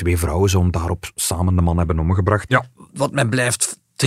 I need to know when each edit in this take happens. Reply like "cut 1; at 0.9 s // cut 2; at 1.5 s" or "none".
cut 1; at 2.5 s